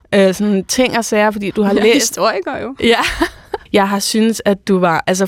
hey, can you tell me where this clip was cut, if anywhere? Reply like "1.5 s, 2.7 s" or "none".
3.7 s